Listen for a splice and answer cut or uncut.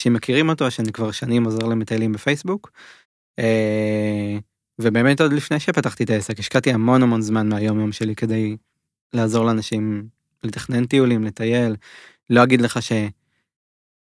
uncut